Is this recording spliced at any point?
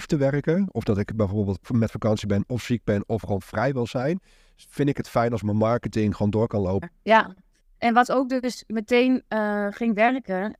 yes; 1 cut; at 6.8 s

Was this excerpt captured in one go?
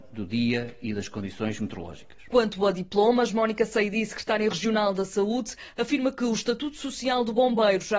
yes; 0 cuts

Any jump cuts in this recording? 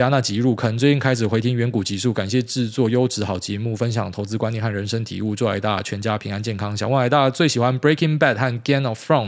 no; 0 cuts

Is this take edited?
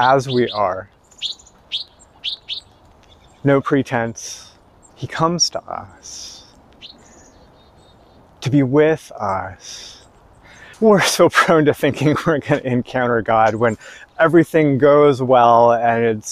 yes; 2 cuts; at 4.9 s, 10.7 s

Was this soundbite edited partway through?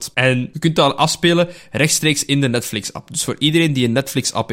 no; 0 cuts

